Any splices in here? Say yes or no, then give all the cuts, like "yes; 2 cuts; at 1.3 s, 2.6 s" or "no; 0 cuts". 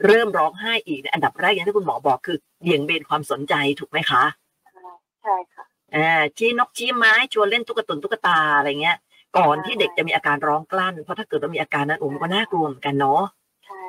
no; 0 cuts